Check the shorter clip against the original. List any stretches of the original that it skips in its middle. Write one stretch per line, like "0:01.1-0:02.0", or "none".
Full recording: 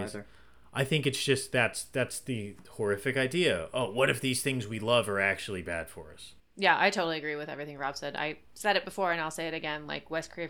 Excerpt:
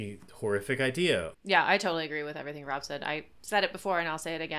0:03.7-0:06.5